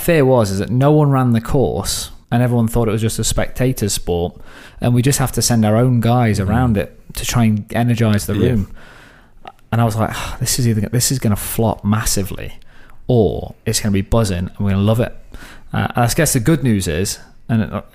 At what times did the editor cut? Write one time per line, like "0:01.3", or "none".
0:02.2